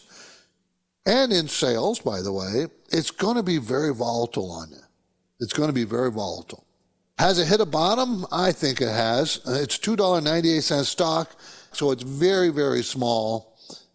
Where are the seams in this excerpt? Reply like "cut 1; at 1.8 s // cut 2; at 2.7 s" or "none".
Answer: cut 1; at 11.7 s